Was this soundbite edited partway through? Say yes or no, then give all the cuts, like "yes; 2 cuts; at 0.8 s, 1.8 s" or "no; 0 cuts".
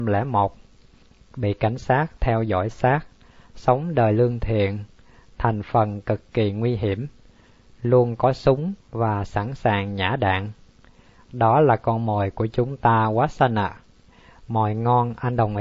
no; 0 cuts